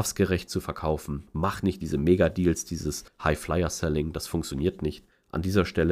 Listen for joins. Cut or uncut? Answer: uncut